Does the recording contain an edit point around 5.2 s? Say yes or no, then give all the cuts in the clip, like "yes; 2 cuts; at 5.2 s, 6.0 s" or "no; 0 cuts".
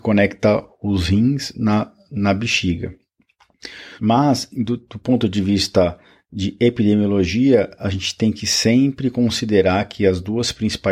no; 1 cut; at 4.0 s